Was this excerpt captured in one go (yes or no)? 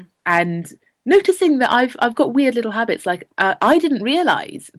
yes